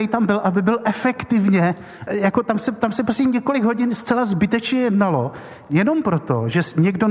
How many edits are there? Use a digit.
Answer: 1